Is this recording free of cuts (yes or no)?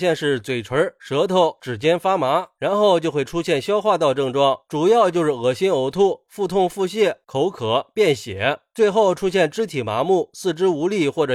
yes